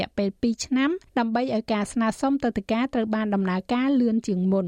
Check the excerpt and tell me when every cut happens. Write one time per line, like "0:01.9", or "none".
0:01.1

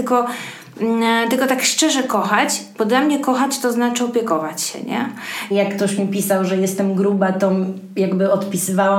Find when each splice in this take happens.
0:05.5

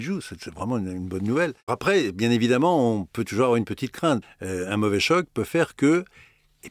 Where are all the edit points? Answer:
0:01.7
0:04.2

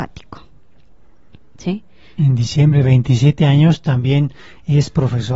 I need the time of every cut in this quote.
0:02.2

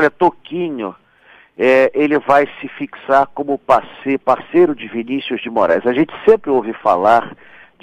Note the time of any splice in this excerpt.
none

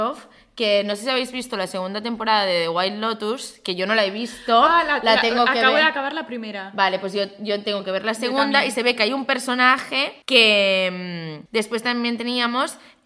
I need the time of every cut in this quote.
0:10.2
0:11.5

